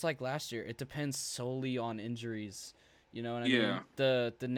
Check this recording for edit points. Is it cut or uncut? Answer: uncut